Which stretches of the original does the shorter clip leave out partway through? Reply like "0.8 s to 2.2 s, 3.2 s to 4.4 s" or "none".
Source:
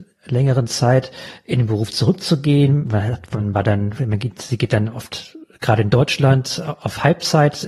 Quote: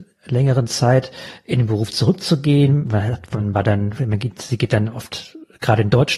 none